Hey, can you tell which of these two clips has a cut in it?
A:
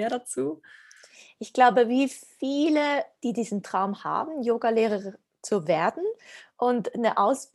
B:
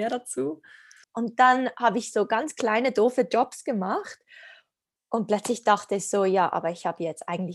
B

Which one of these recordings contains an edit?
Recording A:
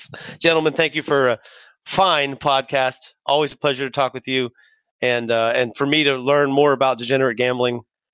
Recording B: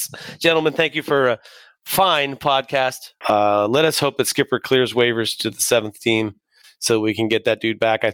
B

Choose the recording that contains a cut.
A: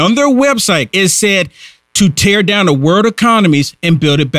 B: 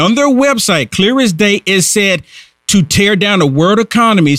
A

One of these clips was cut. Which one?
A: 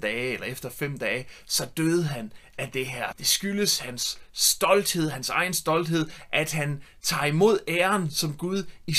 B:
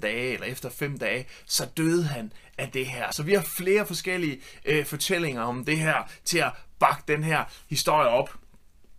A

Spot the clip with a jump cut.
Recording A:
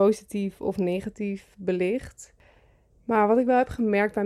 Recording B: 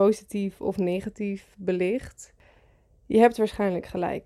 A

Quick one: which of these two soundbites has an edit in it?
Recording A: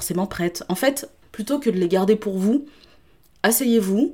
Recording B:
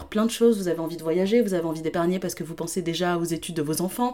A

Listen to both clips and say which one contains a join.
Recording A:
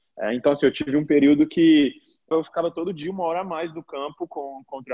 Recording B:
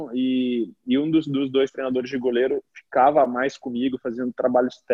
A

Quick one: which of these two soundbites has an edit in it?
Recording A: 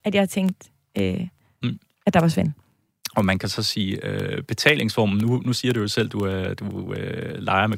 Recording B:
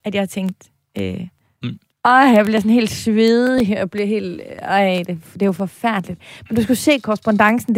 B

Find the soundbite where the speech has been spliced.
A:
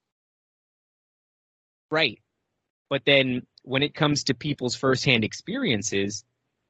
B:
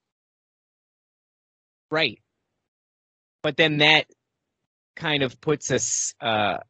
A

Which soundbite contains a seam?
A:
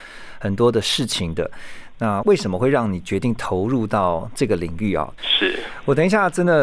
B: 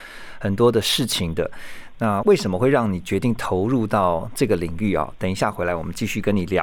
A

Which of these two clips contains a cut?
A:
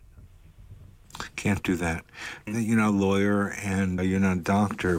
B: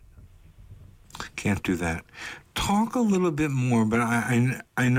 A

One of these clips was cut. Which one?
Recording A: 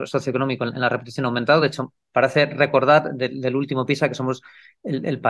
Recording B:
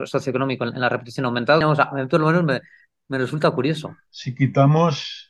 B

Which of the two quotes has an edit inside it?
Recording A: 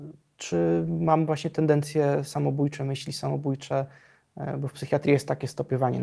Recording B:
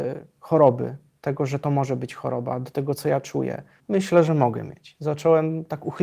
B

